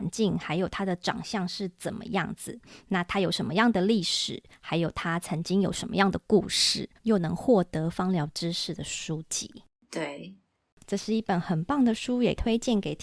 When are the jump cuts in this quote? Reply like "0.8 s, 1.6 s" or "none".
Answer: 7.0 s